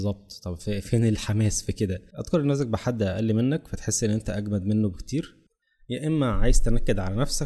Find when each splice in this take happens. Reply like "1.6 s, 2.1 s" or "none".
2.1 s